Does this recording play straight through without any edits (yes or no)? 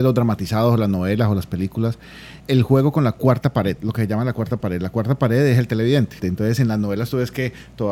no